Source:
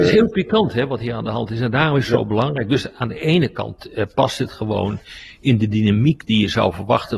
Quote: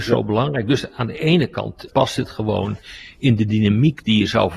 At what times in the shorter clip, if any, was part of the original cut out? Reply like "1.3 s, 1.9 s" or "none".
1.9 s